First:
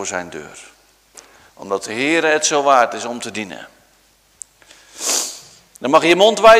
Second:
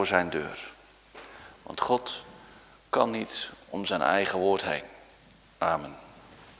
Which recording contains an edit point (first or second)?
first